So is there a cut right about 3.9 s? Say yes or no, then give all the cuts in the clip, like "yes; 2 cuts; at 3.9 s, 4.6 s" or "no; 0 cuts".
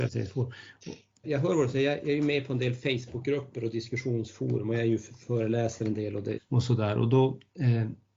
no; 2 cuts; at 1.2 s, 6.4 s